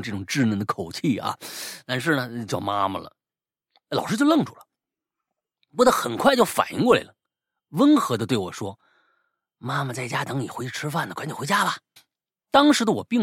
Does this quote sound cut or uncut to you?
cut